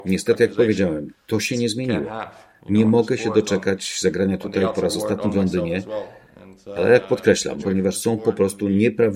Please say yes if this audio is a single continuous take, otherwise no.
no